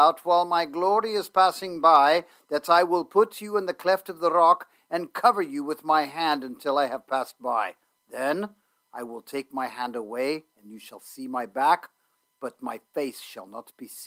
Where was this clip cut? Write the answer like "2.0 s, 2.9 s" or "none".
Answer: none